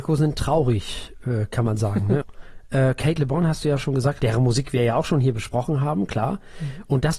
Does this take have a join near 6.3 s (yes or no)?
no